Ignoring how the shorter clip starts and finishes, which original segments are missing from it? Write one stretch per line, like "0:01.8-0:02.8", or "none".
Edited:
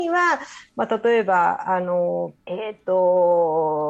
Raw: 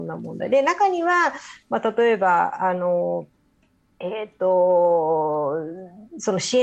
0:03.3-0:03.9